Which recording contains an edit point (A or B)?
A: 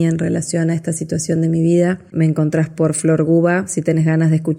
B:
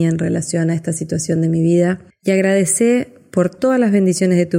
A